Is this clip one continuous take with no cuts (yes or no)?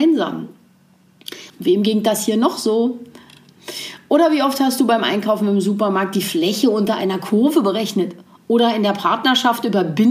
no